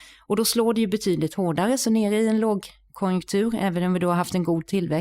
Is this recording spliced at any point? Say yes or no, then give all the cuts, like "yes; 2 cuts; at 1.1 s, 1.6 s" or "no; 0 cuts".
no; 0 cuts